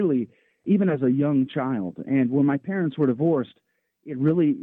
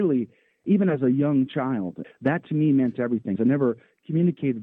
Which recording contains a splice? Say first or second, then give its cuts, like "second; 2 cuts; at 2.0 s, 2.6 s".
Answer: second; 2 cuts; at 2.0 s, 3.4 s